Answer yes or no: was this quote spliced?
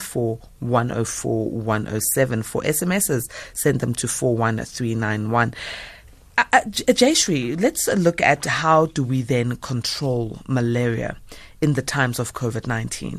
no